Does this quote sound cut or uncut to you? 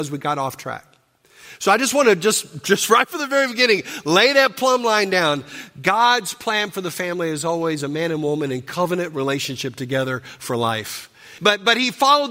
cut